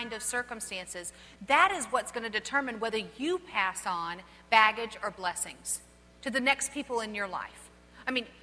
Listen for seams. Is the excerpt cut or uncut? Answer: uncut